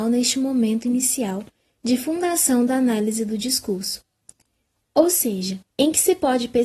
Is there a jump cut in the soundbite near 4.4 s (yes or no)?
no